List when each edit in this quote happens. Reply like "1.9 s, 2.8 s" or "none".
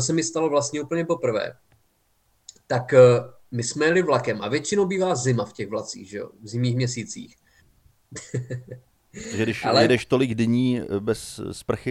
7.6 s